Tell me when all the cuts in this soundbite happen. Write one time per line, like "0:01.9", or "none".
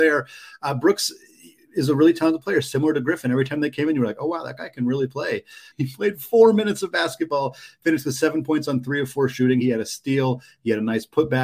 0:05.7
0:09.6